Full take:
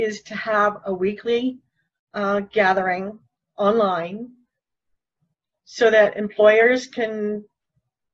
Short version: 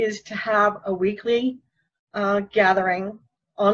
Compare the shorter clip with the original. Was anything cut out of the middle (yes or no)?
no